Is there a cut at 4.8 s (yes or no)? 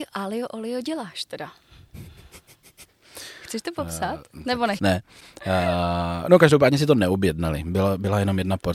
yes